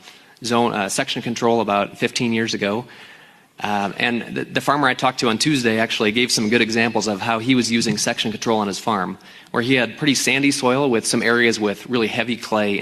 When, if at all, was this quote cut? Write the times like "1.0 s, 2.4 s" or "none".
none